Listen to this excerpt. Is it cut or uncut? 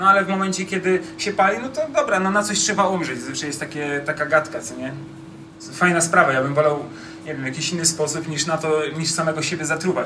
uncut